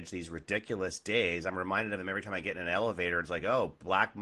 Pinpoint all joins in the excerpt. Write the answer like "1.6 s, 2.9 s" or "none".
none